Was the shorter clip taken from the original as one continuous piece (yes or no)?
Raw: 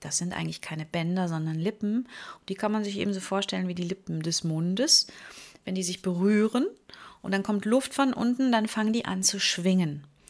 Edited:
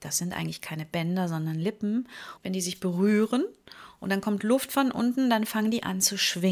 no